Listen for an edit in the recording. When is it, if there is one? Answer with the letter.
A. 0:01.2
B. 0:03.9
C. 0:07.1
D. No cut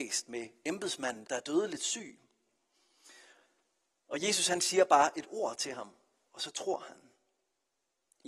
A